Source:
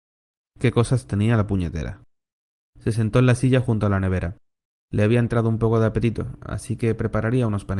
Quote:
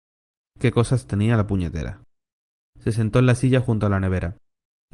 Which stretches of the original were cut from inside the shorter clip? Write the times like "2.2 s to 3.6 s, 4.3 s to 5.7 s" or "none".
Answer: none